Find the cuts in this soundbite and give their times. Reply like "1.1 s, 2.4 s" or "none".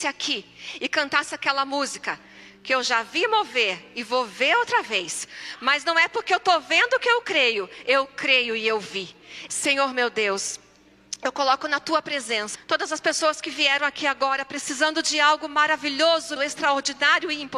9.5 s, 12.5 s, 16.4 s

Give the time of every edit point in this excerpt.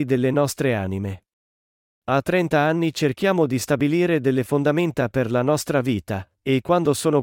1.9 s

